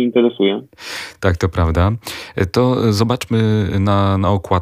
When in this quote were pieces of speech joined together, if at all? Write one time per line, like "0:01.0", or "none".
none